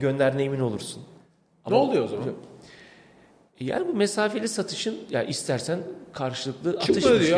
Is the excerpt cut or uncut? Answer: uncut